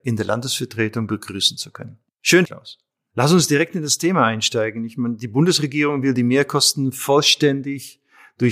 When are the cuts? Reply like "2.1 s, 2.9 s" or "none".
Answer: 2.4 s